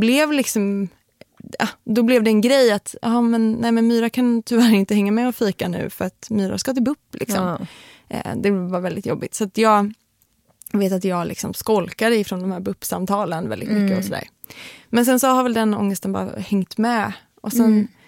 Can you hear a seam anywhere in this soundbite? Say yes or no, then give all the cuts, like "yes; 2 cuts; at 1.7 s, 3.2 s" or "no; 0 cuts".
no; 0 cuts